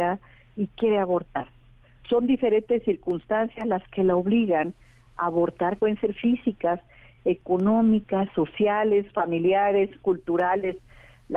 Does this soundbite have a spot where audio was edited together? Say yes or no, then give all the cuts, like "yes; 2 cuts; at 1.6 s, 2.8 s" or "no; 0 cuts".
yes; 1 cut; at 5.8 s